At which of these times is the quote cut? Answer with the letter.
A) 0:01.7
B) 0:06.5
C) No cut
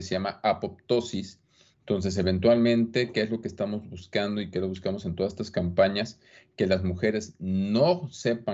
A